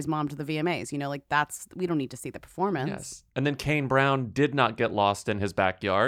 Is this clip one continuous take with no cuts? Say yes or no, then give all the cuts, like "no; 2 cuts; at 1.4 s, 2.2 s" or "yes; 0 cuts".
yes; 0 cuts